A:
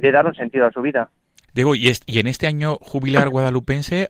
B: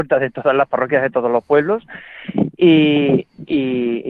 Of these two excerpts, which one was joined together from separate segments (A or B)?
A